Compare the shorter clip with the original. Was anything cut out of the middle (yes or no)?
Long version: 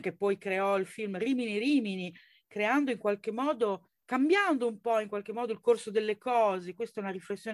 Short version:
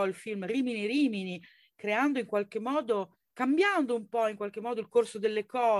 no